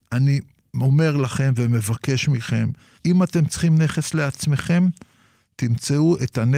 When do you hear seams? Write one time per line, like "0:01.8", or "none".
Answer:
0:03.0